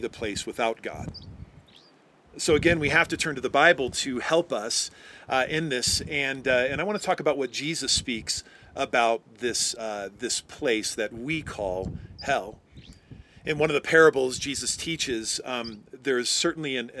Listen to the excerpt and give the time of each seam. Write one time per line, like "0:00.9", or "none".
none